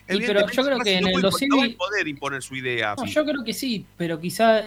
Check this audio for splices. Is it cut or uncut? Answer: cut